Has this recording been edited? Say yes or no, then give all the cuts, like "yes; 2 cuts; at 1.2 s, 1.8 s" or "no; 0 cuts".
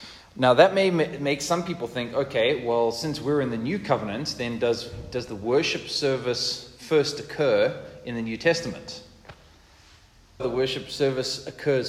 yes; 1 cut; at 10.4 s